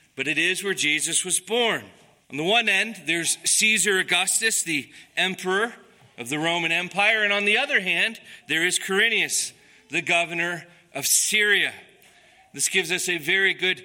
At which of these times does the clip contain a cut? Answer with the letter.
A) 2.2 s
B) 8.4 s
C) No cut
A